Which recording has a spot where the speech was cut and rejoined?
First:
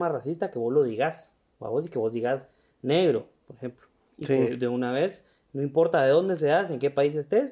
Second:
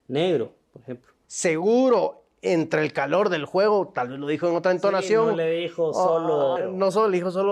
second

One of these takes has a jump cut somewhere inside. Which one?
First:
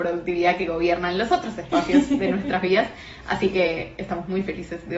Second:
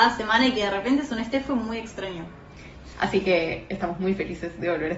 second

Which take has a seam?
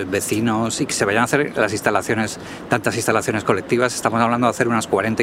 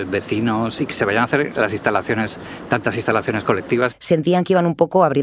second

